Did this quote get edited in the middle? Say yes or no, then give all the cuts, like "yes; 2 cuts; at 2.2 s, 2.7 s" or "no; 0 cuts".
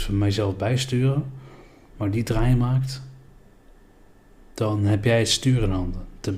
no; 0 cuts